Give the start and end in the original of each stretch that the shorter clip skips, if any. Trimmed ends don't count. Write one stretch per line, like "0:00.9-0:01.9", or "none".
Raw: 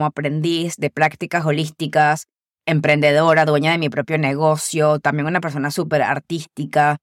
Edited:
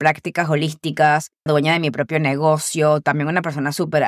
0:02.4-0:03.4

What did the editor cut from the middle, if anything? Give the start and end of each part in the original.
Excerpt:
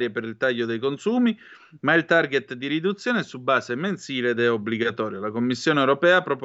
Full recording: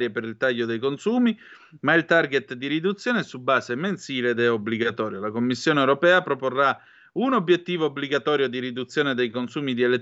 none

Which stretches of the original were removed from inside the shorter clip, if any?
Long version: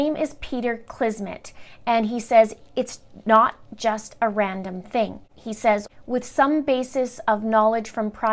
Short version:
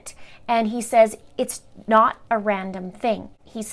0:03.7-0:04.2

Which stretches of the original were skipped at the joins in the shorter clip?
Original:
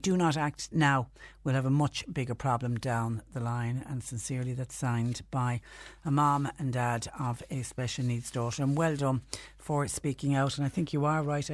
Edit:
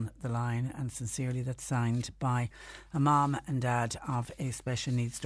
none

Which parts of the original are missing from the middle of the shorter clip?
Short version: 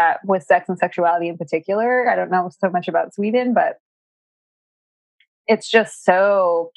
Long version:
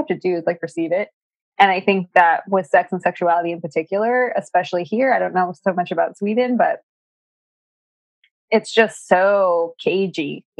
0:04.3-0:05.1

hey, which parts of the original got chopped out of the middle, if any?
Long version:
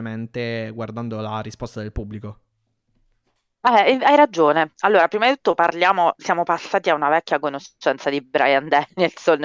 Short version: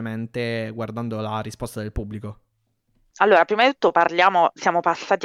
0:03.1-0:04.7

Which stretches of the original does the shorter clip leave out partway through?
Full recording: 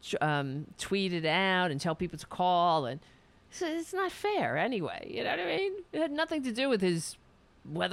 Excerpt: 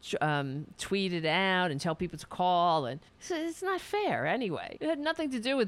0:03.1-0:03.4
0:05.1-0:05.9

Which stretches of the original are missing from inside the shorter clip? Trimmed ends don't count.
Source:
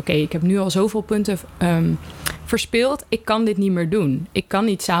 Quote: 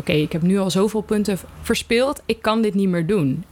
0:01.6-0:02.4

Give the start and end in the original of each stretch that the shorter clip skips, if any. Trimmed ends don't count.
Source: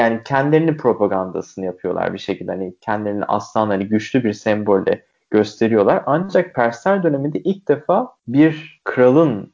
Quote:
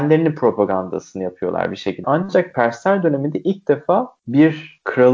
0:02.5-0:06.0

